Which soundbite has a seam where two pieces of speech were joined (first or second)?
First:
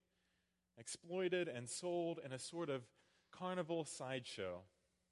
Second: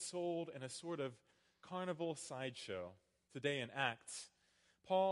second